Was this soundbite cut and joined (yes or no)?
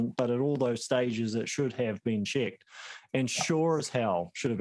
no